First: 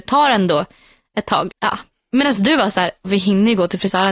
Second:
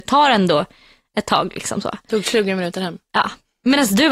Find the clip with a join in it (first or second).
first